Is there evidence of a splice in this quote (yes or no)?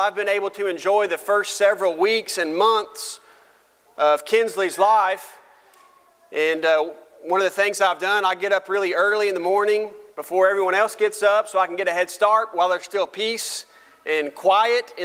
no